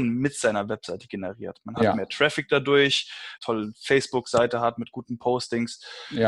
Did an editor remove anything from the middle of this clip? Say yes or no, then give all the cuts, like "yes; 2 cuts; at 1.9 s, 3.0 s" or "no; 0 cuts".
yes; 1 cut; at 3.4 s